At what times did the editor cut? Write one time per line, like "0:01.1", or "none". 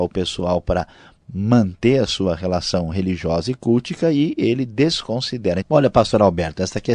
0:05.6

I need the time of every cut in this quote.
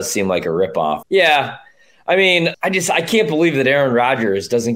0:01.0
0:02.5

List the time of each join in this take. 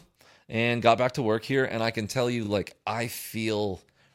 none

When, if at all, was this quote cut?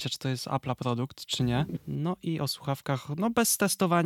0:01.8

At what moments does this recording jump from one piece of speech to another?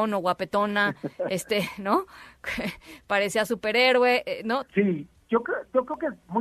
0:04.7

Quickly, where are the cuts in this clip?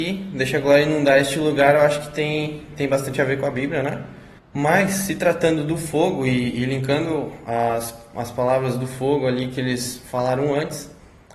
0:04.4

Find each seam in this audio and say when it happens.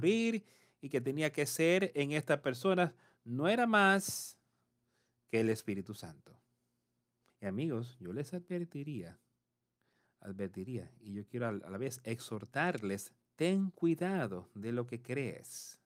0:07.3
0:13.2

